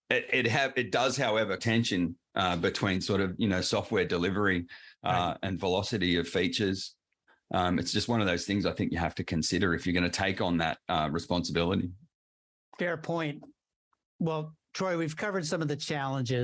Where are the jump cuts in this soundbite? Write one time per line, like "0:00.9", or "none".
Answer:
0:01.6